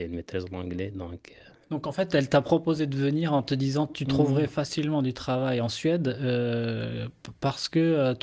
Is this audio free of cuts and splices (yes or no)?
yes